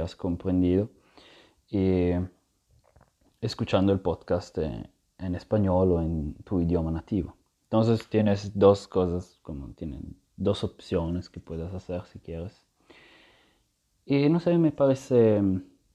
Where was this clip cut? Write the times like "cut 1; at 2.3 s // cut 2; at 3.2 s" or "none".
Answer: none